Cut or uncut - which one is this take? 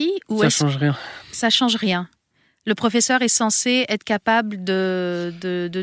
uncut